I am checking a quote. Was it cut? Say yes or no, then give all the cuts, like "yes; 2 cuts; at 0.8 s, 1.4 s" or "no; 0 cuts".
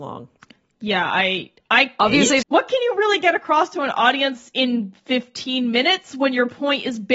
yes; 1 cut; at 2.4 s